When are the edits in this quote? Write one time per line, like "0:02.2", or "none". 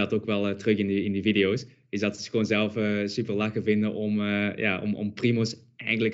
none